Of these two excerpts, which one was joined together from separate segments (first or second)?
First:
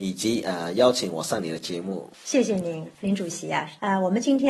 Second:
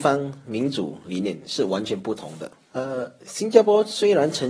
second